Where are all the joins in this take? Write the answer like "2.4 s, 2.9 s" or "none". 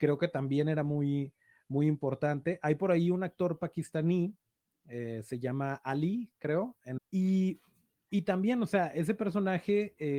7.0 s